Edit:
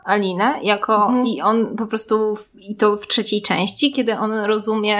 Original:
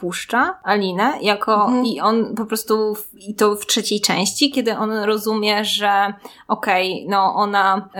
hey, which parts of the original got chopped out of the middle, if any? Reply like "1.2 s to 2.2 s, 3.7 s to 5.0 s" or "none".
none